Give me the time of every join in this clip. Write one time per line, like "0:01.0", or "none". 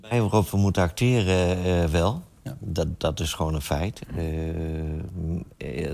none